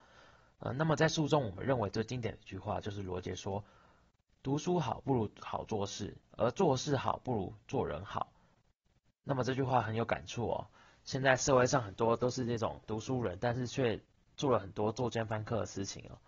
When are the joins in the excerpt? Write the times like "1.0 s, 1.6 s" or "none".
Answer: none